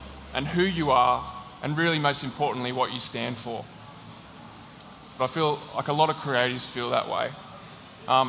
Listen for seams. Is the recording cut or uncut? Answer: cut